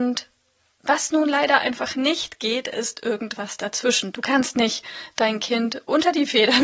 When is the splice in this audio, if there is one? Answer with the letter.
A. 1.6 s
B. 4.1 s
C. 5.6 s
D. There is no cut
B